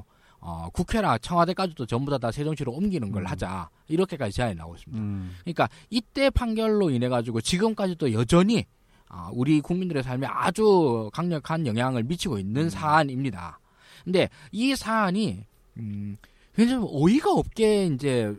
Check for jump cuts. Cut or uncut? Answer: uncut